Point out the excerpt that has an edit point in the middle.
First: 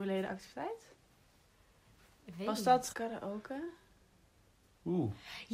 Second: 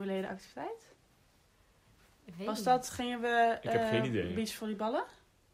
first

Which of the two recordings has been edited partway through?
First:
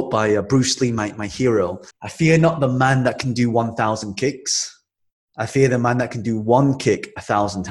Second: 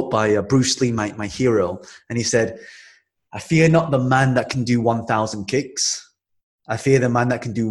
first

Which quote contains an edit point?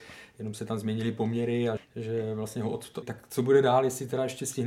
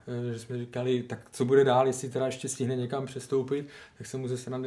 first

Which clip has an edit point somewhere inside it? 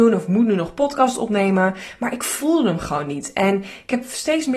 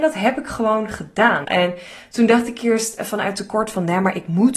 second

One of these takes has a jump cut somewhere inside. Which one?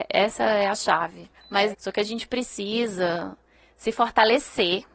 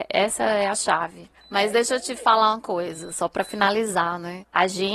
first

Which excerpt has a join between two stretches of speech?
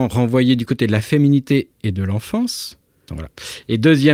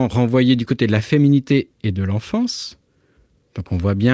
first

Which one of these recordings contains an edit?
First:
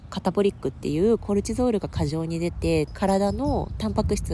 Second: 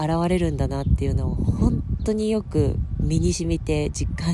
first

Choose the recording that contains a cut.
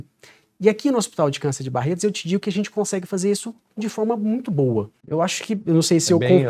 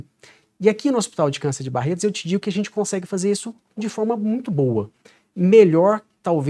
first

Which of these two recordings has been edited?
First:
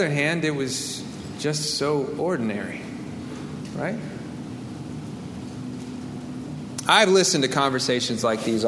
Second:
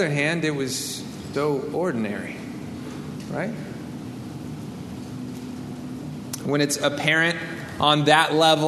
second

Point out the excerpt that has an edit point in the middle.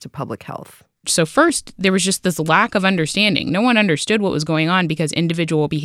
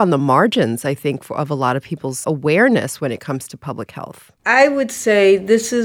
second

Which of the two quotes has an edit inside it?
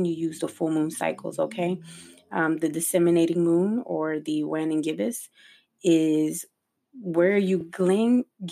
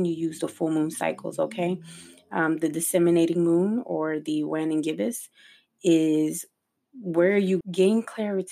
second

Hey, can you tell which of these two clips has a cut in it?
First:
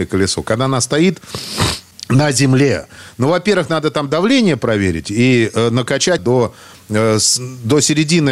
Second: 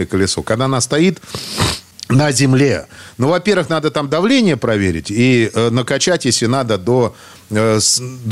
first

